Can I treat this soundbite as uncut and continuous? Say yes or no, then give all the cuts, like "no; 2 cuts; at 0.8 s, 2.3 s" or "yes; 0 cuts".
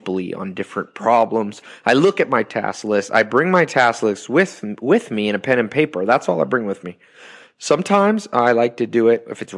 yes; 0 cuts